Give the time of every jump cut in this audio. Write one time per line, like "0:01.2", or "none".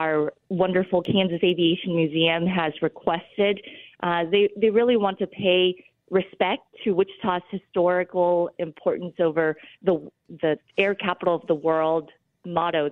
none